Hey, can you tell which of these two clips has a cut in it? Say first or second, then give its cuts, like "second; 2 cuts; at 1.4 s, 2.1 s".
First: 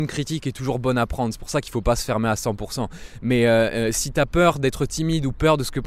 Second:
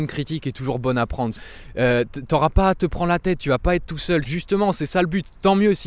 second; 2 cuts; at 1.3 s, 4.2 s